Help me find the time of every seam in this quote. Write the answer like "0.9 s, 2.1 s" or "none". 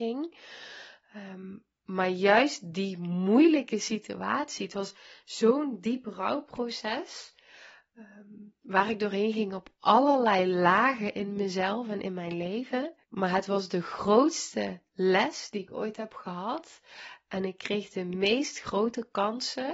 13.0 s